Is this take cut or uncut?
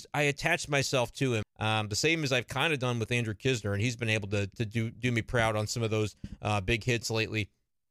cut